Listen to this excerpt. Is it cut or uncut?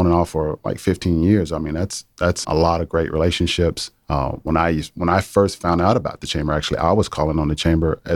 cut